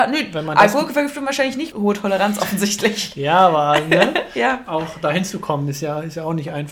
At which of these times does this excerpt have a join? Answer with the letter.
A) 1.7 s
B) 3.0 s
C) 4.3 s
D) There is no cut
A